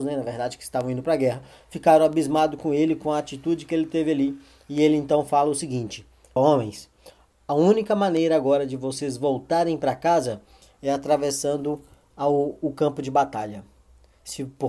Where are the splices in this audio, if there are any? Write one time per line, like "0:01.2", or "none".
0:06.4